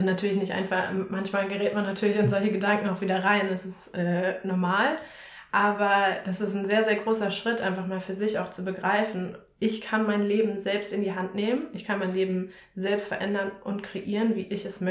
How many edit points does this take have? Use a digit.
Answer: 0